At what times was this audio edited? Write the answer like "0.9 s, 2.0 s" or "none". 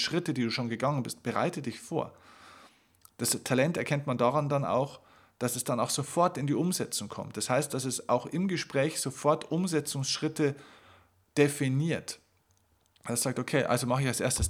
none